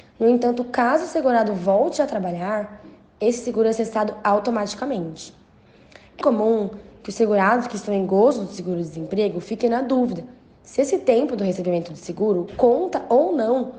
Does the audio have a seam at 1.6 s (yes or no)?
no